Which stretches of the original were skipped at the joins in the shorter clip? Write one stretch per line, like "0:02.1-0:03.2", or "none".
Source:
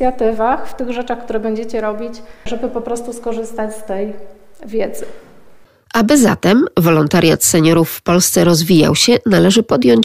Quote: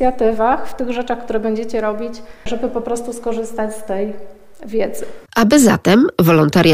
0:05.3-0:05.8